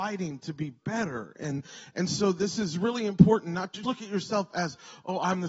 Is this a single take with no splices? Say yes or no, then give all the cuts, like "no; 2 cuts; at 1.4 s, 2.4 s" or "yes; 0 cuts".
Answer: no; 1 cut; at 3.8 s